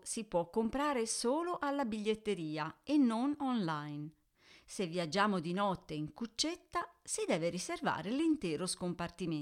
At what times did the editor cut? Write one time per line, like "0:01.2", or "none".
none